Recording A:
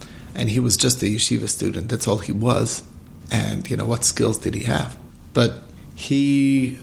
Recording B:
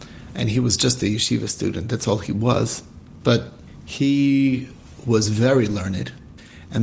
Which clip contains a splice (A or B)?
B